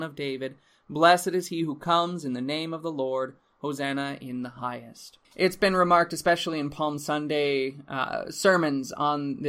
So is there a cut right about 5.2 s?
yes; 1 cut; at 5.2 s

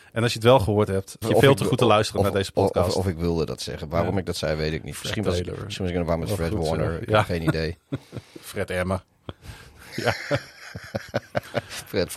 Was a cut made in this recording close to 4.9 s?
no; 1 cut; at 1.2 s

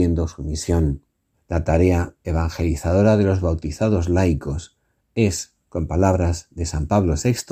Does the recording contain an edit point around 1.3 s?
yes; 1 cut; at 1.3 s

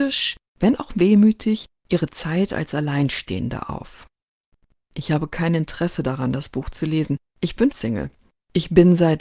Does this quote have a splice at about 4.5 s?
no; 1 cut; at 7.7 s

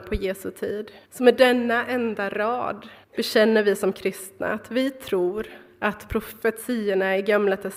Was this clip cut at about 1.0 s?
yes; 2 cuts; at 1.0 s, 3.0 s

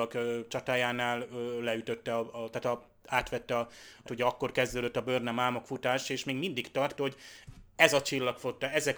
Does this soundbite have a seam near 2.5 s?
no; 2 cuts; at 4.1 s, 7.0 s

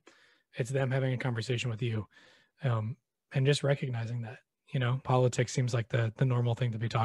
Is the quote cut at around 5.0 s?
yes; 1 cut; at 5.0 s

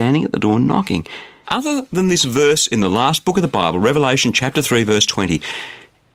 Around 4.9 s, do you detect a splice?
no; 1 cut; at 1.4 s

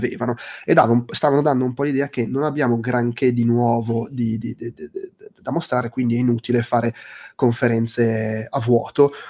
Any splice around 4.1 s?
no; 0 cuts

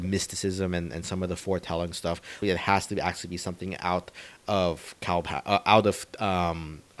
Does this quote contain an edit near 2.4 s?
yes; 1 cut; at 2.4 s

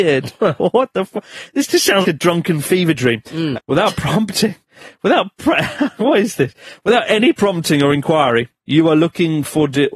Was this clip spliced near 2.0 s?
yes; 3 cuts; at 2.0 s, 3.5 s, 8.6 s

